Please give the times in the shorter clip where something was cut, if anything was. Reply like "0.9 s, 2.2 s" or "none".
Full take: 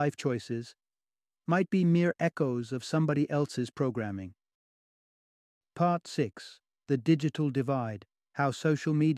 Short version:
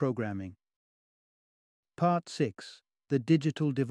none